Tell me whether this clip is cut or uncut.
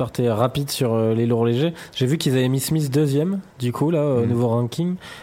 uncut